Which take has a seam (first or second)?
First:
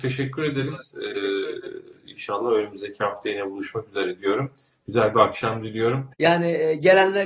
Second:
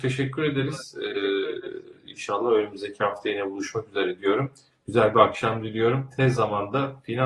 first